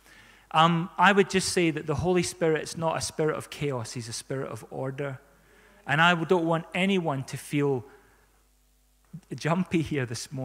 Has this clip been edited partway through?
no; 0 cuts

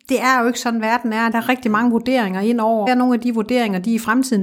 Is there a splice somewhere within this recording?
yes; 2 cuts; at 1.3 s, 2.9 s

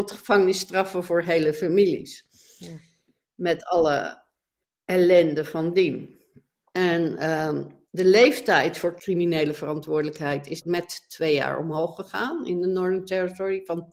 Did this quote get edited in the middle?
no; 0 cuts

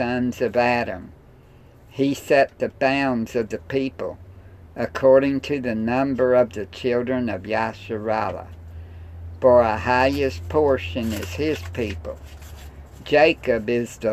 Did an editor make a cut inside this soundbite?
no; 0 cuts

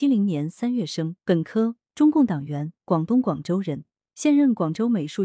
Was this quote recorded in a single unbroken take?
no; 1 cut; at 1.2 s

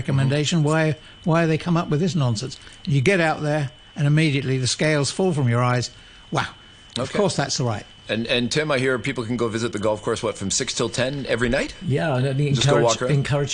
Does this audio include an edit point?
no; 0 cuts

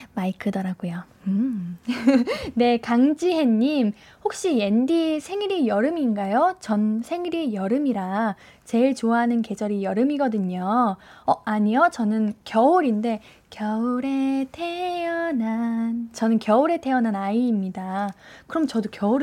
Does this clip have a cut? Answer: no; 0 cuts

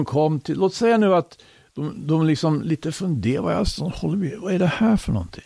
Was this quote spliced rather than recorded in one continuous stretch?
no; 0 cuts

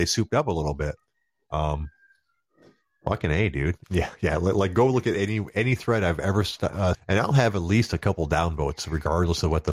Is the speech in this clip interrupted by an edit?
yes; 2 cuts; at 3.8 s, 6.9 s

